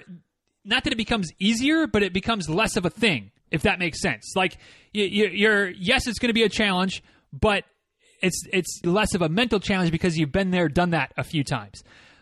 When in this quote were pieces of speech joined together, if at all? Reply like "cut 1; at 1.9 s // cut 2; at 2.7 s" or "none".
cut 1; at 3.4 s // cut 2; at 8.8 s